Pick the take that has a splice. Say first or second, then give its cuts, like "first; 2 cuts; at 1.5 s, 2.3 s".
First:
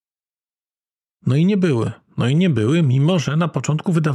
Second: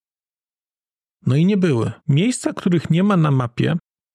second; 1 cut; at 2.0 s